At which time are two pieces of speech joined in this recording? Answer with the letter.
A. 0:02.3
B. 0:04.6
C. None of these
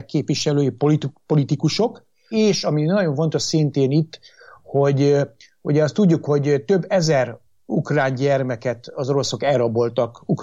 A